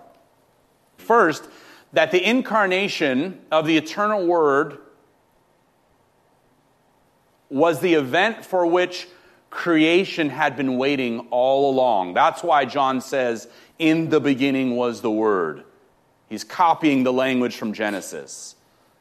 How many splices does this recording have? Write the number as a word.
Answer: one